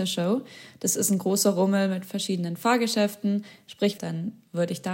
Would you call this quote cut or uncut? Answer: cut